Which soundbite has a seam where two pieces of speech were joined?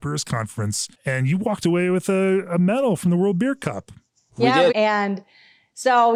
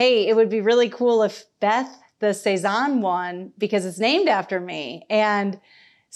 first; 2 cuts; at 0.9 s, 4.7 s

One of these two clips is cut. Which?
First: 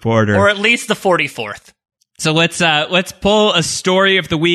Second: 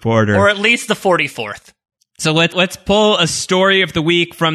second; 1 cut; at 2.5 s

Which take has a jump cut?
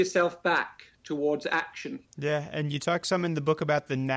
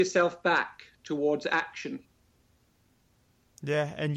first; 1 cut; at 2.1 s

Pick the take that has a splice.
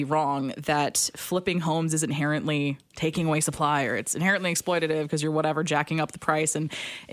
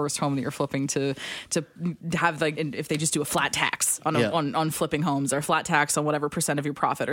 second; 1 cut; at 2.6 s

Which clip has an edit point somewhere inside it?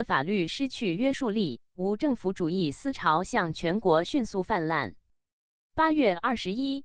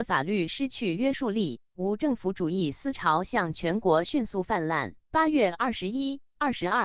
second; 1 cut; at 5.0 s

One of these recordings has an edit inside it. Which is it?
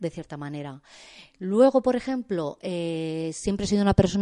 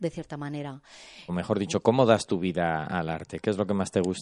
second; 1 cut; at 1.3 s

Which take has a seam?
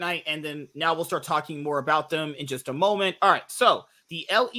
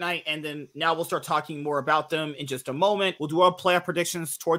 second; 1 cut; at 3.2 s

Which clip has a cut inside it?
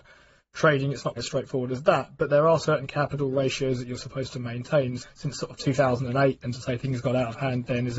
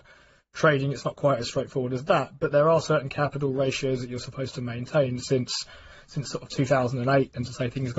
first; 2 cuts; at 1.2 s, 5.0 s

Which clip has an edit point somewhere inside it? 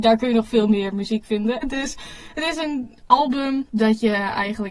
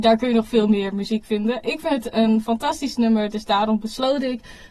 first; 1 cut; at 1.6 s

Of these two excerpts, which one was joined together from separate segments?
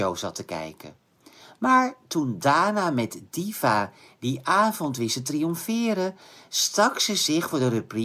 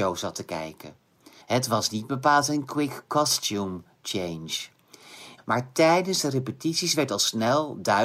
second; 2 cuts; at 1.4 s, 5.4 s

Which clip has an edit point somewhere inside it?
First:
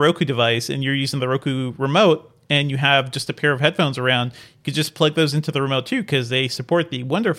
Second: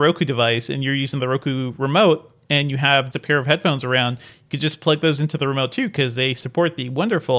second; 1 cut; at 3.1 s

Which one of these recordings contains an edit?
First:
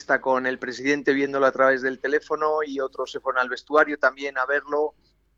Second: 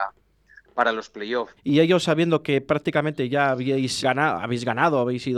second; 2 cuts; at 1.6 s, 4.0 s

